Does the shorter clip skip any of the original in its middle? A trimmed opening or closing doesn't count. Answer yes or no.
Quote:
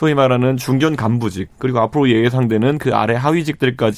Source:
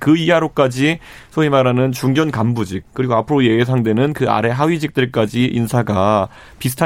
no